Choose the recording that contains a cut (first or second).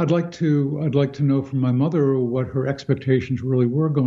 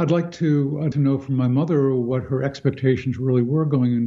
second